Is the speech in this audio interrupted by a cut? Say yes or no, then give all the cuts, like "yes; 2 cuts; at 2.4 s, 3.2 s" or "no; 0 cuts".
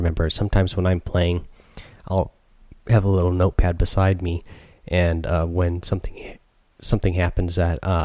no; 0 cuts